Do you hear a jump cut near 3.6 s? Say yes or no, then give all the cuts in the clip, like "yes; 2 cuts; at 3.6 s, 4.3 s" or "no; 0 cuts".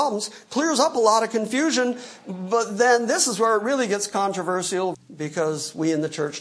no; 1 cut; at 4.9 s